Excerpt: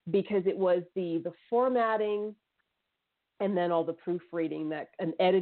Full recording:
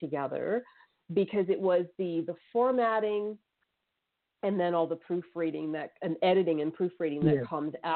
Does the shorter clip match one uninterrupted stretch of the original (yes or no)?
yes